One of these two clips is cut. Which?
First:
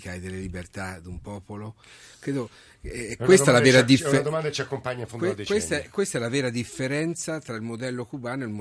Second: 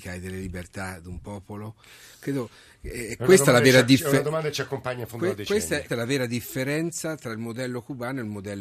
second; 1 cut; at 5.9 s

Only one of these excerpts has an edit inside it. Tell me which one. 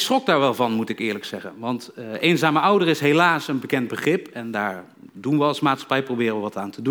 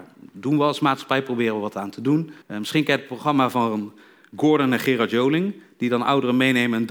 second; 1 cut; at 2.4 s

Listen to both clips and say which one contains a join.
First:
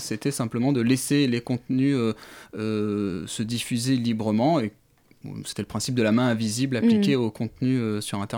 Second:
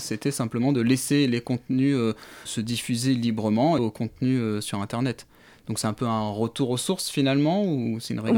second; 2 cuts; at 2.5 s, 3.8 s

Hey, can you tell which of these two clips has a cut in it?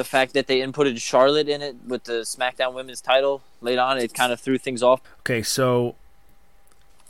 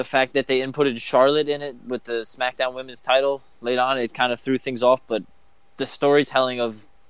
first; 1 cut; at 5.0 s

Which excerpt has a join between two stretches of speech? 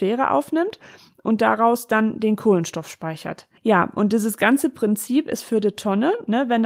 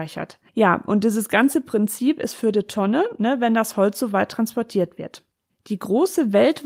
second; 1 cut; at 5.5 s

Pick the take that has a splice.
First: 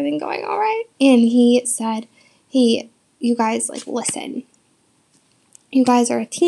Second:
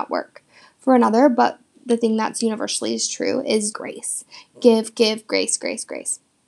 second; 1 cut; at 3.7 s

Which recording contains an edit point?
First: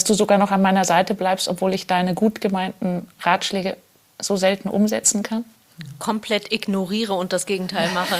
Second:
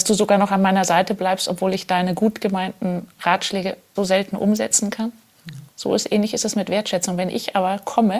second; 2 cuts; at 4.0 s, 5.6 s

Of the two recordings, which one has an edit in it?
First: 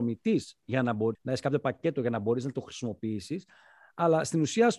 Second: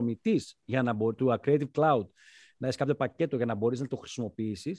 first; 1 cut; at 1.2 s

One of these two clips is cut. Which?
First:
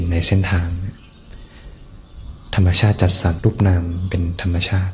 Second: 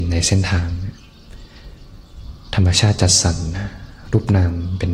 first; 1 cut; at 3.4 s

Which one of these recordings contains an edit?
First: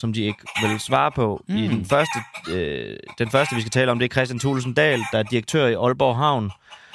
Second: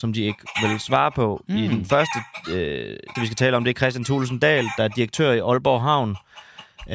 second; 1 cut; at 3.2 s

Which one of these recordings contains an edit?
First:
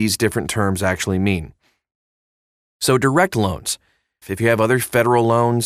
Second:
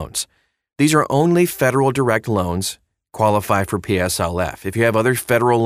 first; 1 cut; at 4.2 s

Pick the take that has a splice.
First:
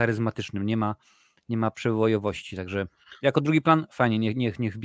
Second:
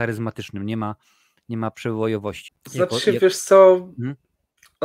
second; 1 cut; at 2.5 s

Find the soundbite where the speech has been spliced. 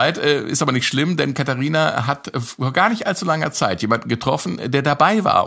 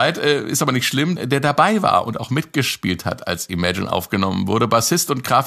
second; 1 cut; at 1.2 s

